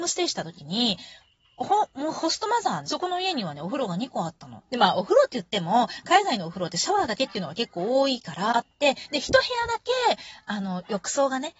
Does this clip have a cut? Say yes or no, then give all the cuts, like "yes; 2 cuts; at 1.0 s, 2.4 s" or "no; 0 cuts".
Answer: yes; 3 cuts; at 2.8 s, 4.7 s, 8.5 s